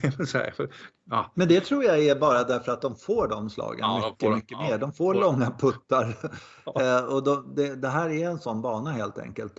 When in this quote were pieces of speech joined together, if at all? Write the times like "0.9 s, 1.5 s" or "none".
none